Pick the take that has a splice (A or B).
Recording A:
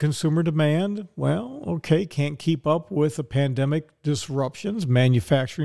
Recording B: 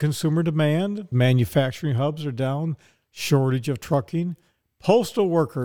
B